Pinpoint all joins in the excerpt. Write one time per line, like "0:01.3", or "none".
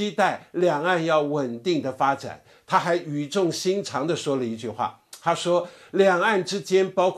none